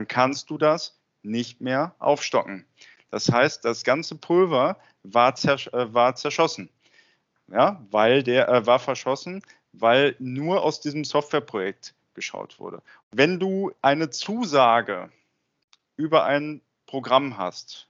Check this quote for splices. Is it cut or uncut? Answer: cut